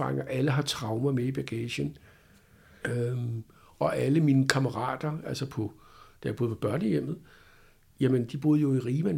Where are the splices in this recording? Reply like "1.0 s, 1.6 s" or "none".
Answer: 2.8 s, 8.3 s